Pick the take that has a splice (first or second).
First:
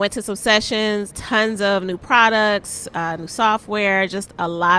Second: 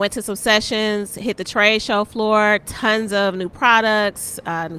first